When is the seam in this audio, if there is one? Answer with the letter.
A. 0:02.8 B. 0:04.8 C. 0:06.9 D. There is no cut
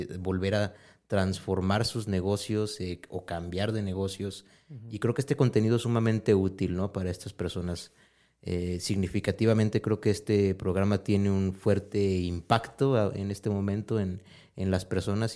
D